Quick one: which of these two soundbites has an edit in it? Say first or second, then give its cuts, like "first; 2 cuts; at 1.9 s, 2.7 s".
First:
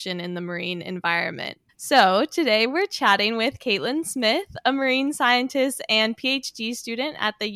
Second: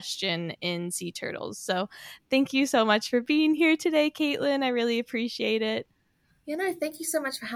first; 1 cut; at 1.7 s